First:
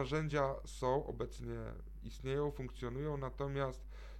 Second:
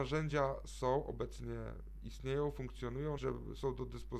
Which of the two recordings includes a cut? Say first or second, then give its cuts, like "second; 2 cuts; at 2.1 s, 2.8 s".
second; 1 cut; at 3.2 s